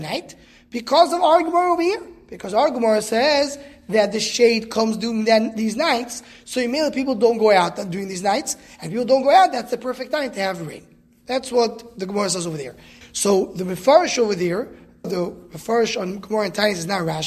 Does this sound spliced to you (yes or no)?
yes